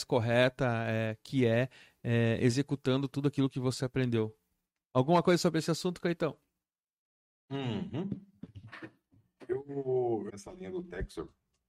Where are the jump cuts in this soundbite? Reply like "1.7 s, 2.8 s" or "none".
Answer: 10.3 s